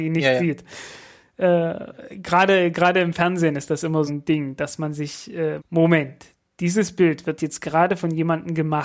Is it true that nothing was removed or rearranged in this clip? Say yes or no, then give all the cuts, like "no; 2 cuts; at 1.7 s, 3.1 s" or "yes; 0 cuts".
no; 2 cuts; at 4.1 s, 5.6 s